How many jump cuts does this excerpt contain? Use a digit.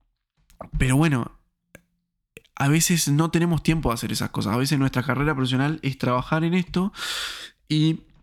0